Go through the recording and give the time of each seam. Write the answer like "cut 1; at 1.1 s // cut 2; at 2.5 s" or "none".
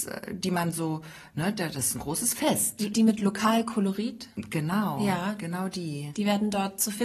cut 1; at 2.9 s